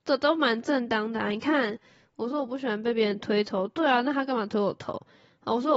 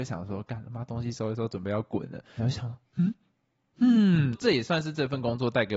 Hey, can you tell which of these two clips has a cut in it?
second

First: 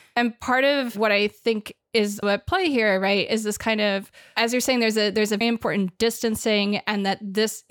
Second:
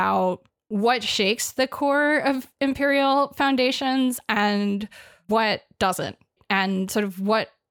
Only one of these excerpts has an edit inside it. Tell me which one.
first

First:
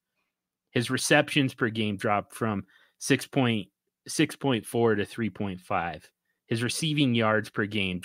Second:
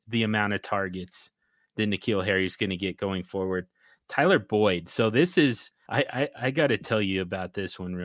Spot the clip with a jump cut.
second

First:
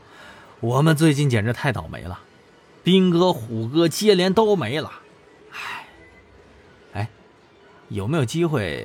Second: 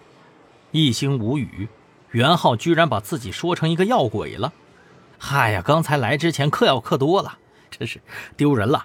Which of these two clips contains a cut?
second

